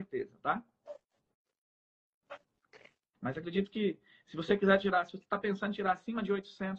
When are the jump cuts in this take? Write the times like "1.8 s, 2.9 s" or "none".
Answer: 3.1 s